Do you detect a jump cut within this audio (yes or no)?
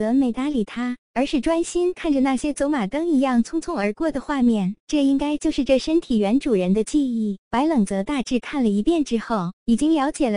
no